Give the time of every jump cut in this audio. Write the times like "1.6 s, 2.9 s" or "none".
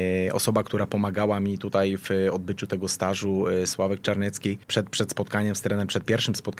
4.6 s